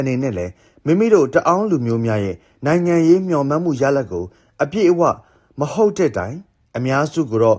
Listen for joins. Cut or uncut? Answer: uncut